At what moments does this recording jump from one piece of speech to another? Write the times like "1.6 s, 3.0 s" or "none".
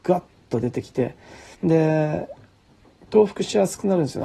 1.5 s